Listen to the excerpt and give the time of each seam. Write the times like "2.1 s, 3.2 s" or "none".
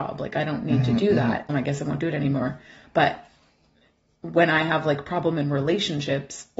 1.5 s